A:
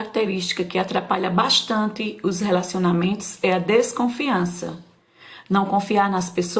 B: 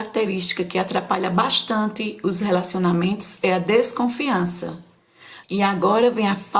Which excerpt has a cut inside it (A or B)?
B